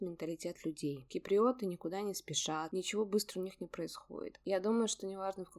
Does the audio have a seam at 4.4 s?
yes; 1 cut; at 4.4 s

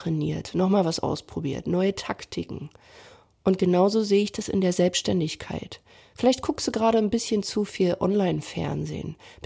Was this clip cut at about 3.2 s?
no; 0 cuts

